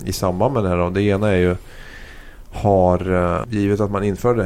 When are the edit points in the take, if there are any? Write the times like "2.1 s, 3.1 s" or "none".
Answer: 3.4 s